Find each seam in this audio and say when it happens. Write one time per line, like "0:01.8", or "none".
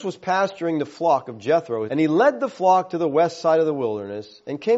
0:01.9